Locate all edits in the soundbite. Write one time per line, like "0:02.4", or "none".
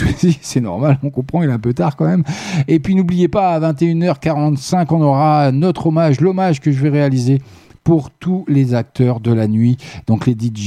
none